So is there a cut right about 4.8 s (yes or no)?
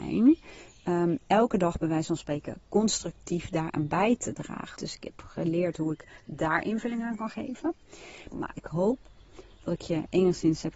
yes